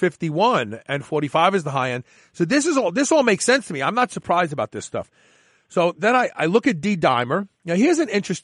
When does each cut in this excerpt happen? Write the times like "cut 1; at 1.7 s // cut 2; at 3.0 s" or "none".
none